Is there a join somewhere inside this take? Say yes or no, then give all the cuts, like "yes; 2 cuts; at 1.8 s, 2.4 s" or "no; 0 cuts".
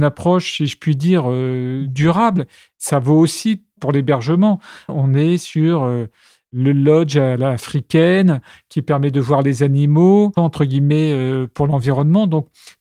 yes; 2 cuts; at 4.9 s, 10.4 s